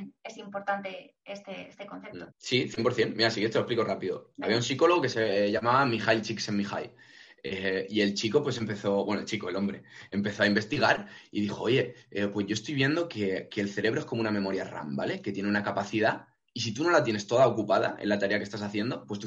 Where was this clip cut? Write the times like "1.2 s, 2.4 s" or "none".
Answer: 2.3 s